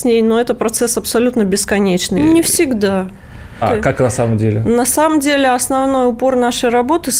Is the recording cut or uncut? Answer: cut